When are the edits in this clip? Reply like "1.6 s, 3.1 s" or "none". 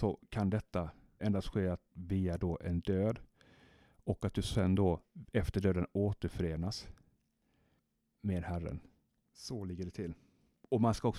1.2 s